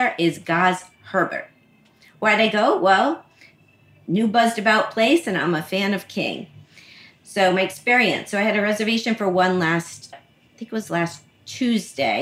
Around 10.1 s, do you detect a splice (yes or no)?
yes